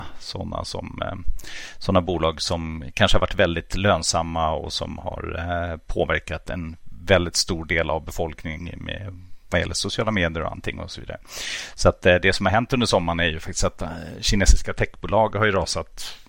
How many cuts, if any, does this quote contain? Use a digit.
0